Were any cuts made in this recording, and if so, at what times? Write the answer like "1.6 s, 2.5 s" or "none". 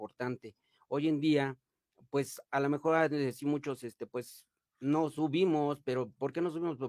none